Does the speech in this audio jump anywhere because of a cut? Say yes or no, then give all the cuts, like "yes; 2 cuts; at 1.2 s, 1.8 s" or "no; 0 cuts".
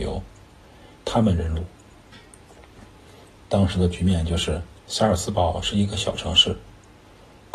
yes; 2 cuts; at 1.0 s, 4.8 s